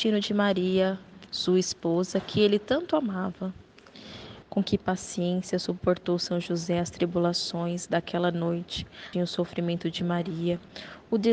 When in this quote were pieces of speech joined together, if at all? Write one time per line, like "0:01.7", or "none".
0:01.3
0:04.4
0:09.1